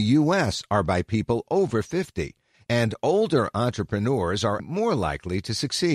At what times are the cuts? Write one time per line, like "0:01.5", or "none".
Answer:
0:04.6